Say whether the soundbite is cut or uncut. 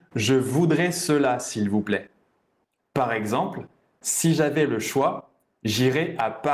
cut